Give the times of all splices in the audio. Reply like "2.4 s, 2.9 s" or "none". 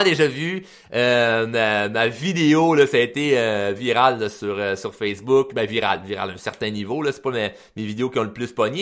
none